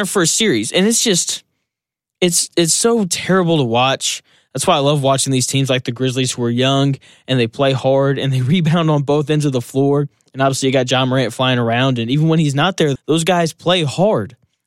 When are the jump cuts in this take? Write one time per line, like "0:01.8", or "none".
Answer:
0:13.0